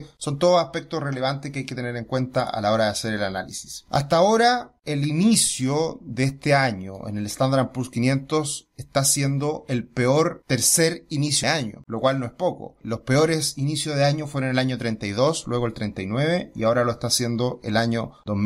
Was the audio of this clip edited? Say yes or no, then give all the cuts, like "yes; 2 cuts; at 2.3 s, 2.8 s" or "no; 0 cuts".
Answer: no; 0 cuts